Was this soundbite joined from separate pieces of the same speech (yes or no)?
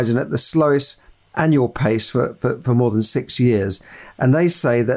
no